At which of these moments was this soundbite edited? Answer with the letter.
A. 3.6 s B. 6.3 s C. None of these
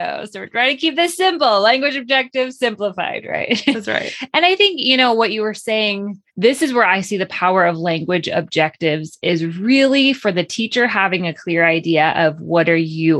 B